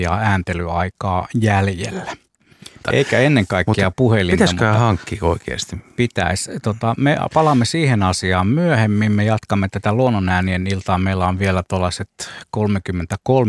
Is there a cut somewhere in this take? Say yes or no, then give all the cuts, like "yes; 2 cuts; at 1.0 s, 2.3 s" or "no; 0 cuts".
yes; 1 cut; at 2.8 s